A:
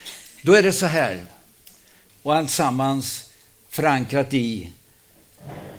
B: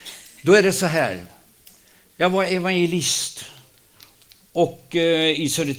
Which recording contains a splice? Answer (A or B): A